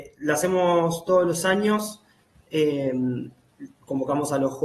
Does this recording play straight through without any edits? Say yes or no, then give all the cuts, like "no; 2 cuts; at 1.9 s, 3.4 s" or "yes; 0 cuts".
yes; 0 cuts